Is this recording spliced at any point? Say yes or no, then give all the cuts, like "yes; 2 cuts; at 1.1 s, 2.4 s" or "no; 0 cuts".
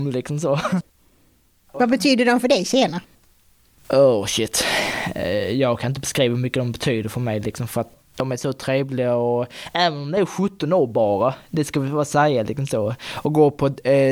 no; 0 cuts